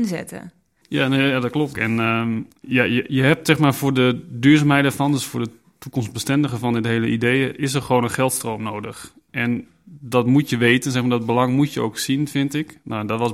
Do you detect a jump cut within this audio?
yes; 1 cut; at 1.7 s

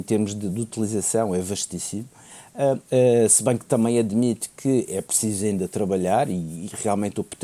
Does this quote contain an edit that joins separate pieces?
yes; 1 cut; at 2.8 s

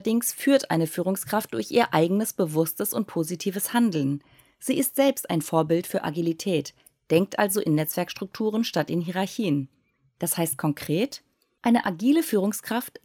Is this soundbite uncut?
yes; 0 cuts

